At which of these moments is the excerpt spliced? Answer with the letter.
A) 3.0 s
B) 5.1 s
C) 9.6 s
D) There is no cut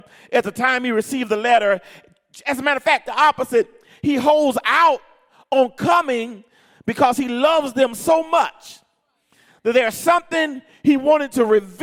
A